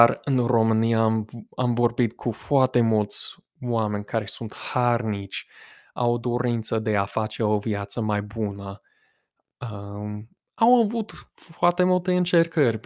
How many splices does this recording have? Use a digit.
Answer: 1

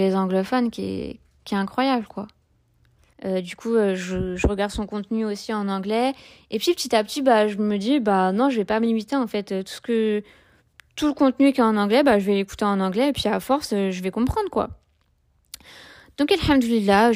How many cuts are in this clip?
1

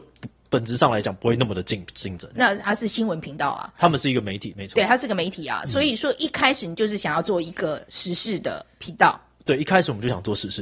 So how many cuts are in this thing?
1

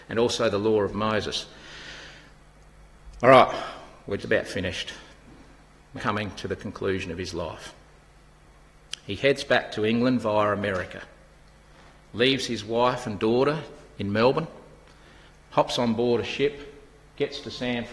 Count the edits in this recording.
2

